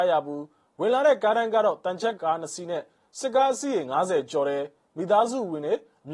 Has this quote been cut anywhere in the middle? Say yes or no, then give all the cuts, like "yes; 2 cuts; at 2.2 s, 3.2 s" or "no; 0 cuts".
yes; 1 cut; at 2.2 s